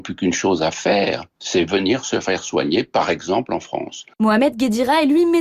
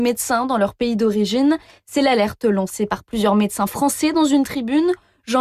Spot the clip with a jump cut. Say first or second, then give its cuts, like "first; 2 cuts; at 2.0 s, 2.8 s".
first; 1 cut; at 1.3 s